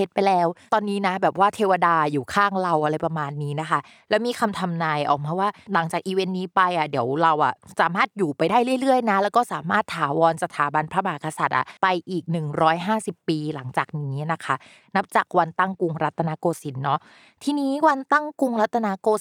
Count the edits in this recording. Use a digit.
1